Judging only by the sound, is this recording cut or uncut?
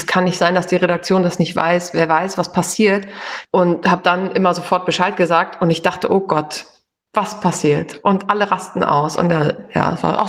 cut